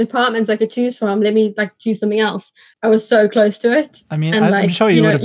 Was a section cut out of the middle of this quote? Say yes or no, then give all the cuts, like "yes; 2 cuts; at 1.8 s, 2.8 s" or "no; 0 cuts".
yes; 1 cut; at 2.7 s